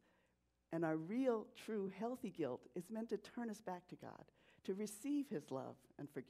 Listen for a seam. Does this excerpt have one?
no; 0 cuts

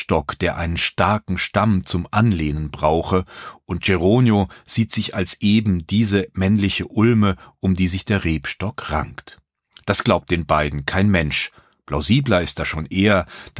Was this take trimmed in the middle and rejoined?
no; 0 cuts

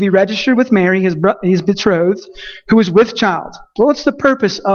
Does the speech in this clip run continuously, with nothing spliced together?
no; 1 cut; at 3.8 s

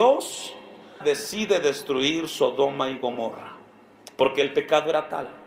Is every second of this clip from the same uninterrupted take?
no; 1 cut; at 1.0 s

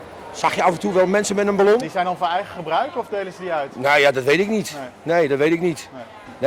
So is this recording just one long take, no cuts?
no; 1 cut; at 1.8 s

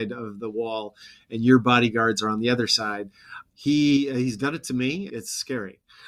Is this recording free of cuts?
no; 2 cuts; at 3.5 s, 5.1 s

